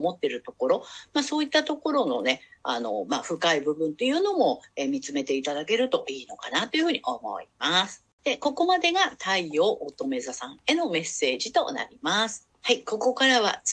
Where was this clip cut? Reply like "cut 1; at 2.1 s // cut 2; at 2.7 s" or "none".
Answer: cut 1; at 12.5 s